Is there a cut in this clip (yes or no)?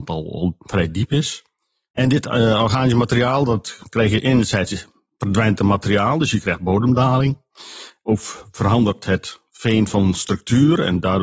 yes